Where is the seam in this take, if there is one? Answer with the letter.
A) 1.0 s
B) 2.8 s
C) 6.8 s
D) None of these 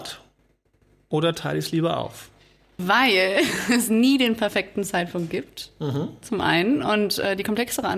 B